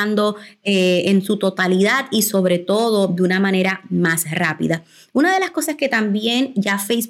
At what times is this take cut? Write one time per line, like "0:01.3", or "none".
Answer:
none